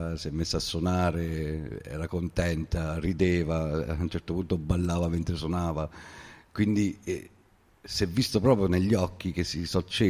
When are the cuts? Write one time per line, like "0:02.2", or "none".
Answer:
none